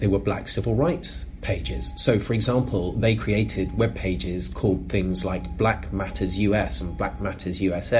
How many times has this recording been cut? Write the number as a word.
zero